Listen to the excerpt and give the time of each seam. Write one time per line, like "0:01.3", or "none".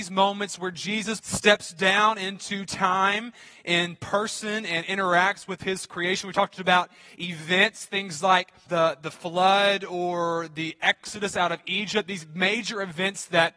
0:01.2
0:08.7